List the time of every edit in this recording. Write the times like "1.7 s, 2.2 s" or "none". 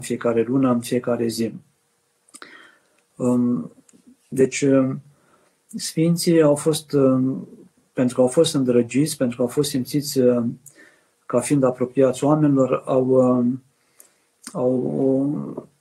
4.3 s